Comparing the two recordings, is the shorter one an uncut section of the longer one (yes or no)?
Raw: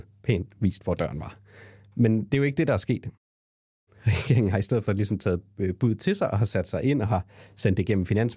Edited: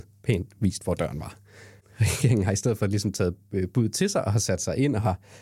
no